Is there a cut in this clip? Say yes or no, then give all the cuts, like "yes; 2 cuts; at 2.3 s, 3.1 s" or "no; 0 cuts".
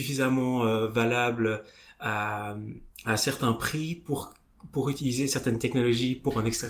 no; 0 cuts